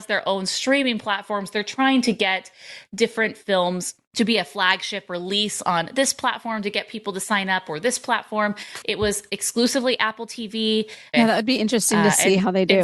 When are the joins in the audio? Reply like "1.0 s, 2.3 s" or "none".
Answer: 8.8 s, 11.1 s